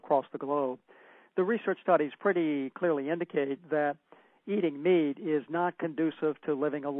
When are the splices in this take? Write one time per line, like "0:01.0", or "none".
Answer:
none